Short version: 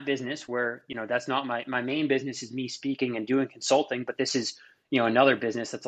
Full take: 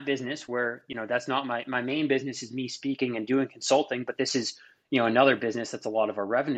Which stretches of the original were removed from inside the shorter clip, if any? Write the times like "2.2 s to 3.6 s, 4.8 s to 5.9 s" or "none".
none